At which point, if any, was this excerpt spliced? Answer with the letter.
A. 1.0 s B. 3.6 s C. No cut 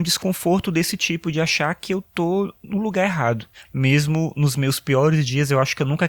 B